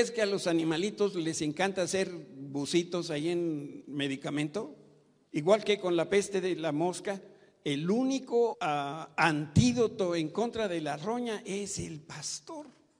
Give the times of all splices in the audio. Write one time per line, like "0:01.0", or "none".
0:05.3
0:08.5